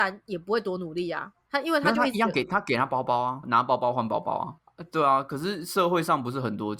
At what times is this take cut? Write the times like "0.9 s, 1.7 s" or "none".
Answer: 3.4 s, 4.6 s